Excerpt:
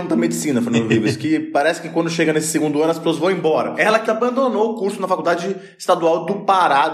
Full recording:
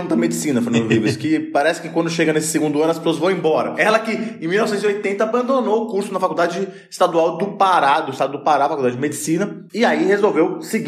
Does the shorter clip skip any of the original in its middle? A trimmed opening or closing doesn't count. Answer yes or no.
yes